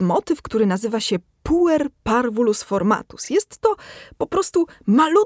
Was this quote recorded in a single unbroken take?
yes; 0 cuts

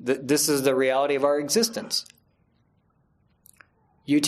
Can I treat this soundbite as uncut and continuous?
yes; 0 cuts

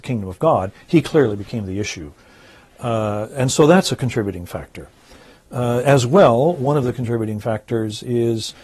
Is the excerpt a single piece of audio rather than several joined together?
yes; 0 cuts

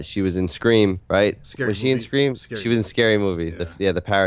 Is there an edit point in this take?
yes; 1 cut; at 1.0 s

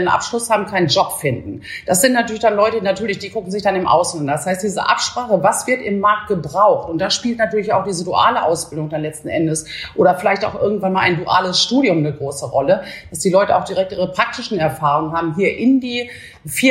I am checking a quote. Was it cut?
no; 0 cuts

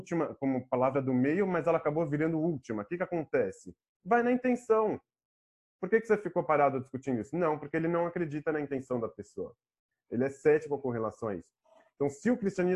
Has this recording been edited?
no; 0 cuts

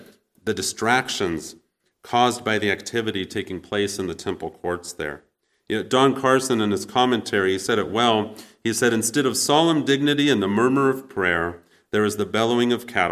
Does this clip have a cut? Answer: no; 0 cuts

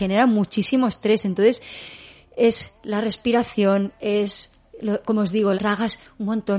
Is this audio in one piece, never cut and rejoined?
no; 1 cut; at 5.5 s

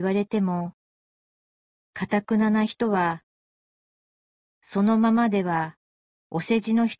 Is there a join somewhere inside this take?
no; 0 cuts

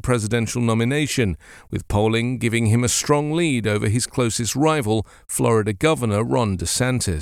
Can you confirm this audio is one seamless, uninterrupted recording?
yes; 0 cuts

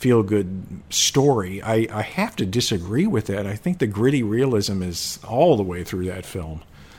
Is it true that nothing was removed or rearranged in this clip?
yes; 0 cuts

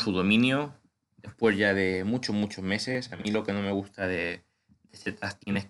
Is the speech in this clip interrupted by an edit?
no; 0 cuts

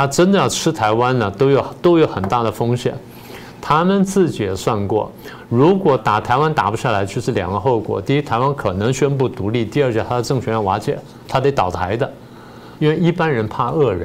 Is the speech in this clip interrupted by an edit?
yes; 2 cuts; at 6.0 s, 12.8 s

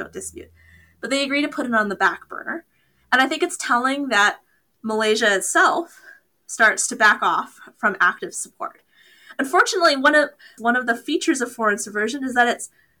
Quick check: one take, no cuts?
no; 1 cut; at 10.6 s

